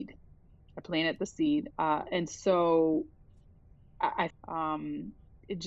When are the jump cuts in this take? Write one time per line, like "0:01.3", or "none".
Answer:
0:01.7
0:04.3